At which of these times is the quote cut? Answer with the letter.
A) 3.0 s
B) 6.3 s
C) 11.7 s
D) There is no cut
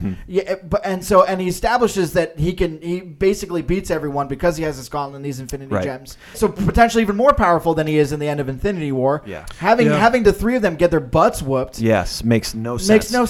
B